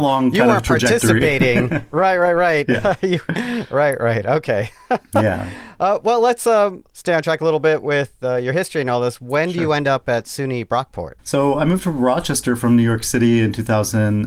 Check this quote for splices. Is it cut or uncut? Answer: uncut